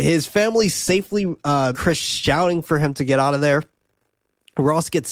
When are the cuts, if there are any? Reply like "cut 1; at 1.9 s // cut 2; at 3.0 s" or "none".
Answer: cut 1; at 1.7 s